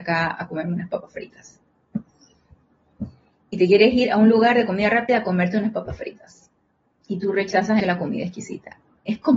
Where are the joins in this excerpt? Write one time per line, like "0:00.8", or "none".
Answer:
0:07.8